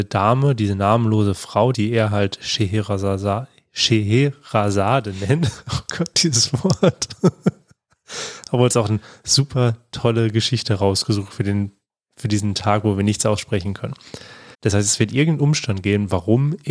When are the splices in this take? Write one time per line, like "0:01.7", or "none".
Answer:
0:01.7
0:14.5